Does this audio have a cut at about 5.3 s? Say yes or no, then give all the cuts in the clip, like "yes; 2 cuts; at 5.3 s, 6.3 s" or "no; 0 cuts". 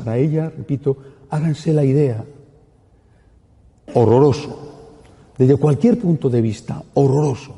no; 1 cut; at 3.9 s